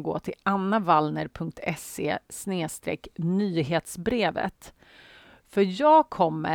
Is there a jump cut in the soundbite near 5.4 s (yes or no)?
no